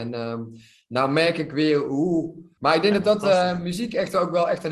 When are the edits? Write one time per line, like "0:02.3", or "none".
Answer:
0:02.6